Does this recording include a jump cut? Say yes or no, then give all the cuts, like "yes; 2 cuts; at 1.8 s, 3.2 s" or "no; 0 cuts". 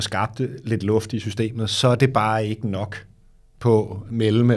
no; 0 cuts